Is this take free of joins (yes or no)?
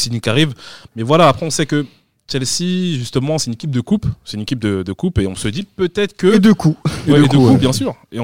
yes